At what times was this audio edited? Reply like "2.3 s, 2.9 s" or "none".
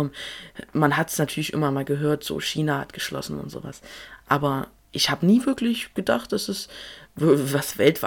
none